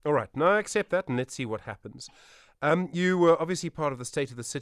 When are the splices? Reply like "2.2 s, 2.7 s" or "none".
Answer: none